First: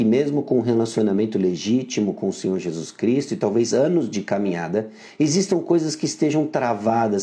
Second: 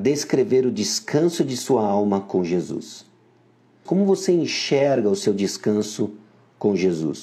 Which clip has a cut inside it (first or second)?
second